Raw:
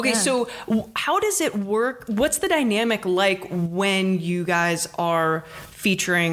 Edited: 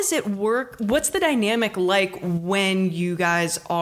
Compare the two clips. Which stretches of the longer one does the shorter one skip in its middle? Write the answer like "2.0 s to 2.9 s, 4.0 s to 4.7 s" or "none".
none